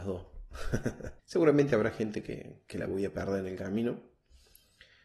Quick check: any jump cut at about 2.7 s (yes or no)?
no